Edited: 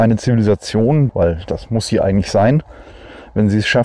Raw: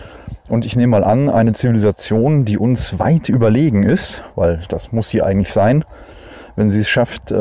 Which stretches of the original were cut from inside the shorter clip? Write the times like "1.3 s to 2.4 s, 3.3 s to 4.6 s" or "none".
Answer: 2.5 s to 4.3 s